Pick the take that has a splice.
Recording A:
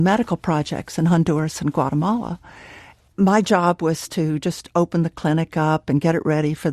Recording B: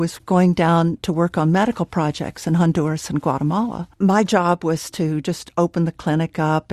B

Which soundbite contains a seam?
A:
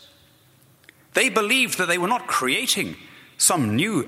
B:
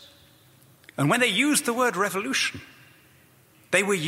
B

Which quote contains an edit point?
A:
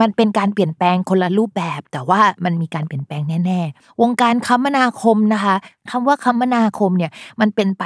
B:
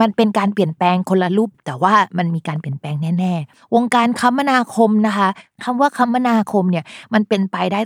B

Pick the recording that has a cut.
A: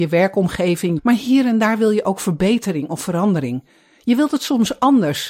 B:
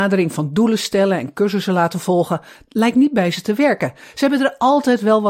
A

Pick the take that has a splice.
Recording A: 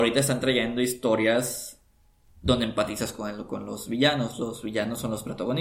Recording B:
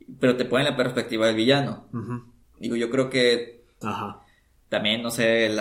B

